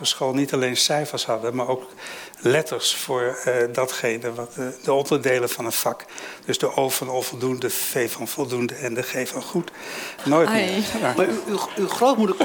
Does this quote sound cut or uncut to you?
cut